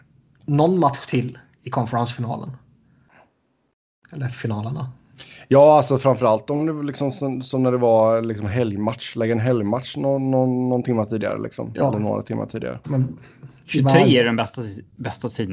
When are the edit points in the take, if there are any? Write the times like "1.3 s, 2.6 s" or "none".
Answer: 12.8 s